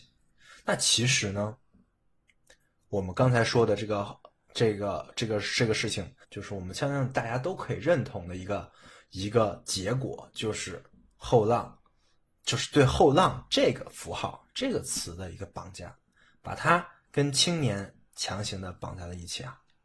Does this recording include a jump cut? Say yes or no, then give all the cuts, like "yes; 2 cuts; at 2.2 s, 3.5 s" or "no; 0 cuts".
yes; 1 cut; at 6.2 s